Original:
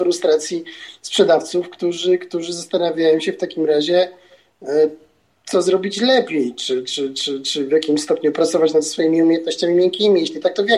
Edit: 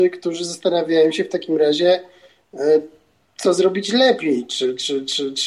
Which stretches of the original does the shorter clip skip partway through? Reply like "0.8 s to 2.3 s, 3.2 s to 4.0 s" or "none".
none